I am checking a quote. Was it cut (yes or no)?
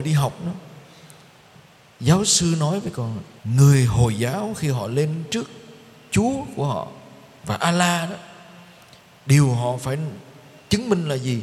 yes